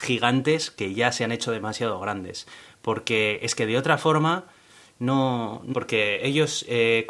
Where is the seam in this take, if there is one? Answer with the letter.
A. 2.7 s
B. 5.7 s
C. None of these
B